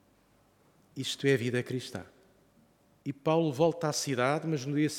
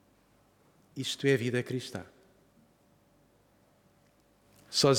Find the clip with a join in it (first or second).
first